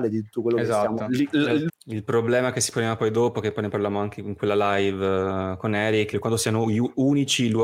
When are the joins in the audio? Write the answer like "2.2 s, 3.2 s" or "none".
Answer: 1.7 s, 6.1 s